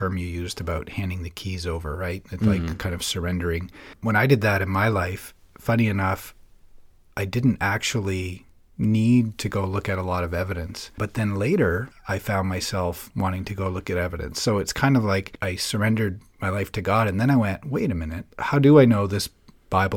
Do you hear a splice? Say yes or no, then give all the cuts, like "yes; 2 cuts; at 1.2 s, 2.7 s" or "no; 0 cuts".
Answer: no; 0 cuts